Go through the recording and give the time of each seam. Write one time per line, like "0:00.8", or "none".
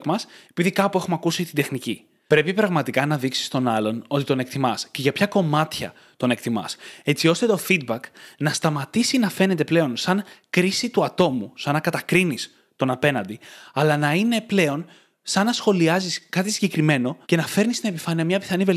0:02.3
0:17.2